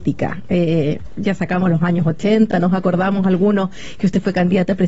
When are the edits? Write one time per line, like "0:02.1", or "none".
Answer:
0:02.5

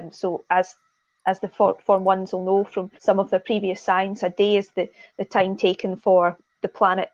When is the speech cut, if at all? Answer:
0:03.0

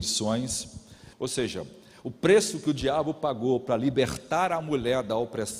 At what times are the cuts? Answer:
0:01.1

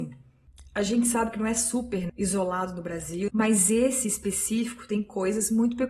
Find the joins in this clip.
0:02.1
0:03.3

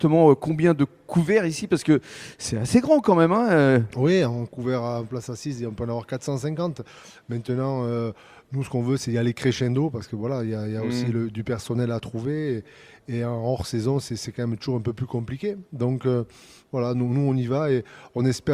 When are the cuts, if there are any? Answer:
none

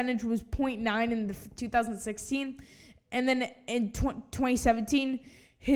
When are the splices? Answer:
none

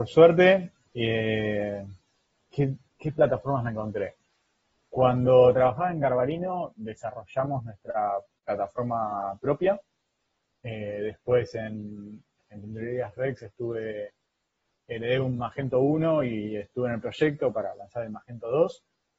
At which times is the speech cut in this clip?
none

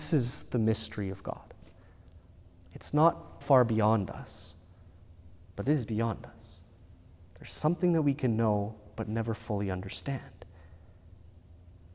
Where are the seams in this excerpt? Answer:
0:03.4

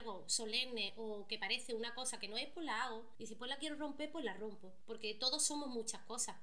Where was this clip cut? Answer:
none

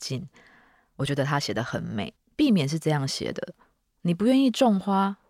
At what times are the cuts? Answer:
0:02.2

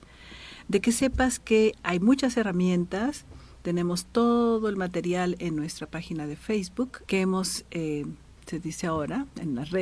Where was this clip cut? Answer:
0:07.0
0:08.4

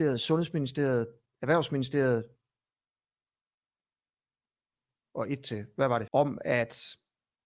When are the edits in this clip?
0:06.1

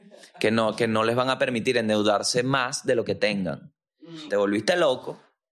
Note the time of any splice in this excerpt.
0:04.3

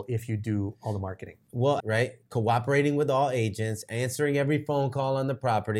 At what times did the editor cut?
0:01.8

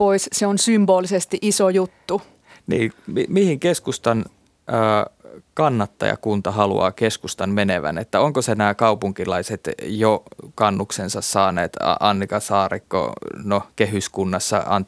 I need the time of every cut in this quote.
none

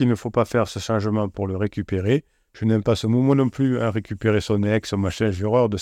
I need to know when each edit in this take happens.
none

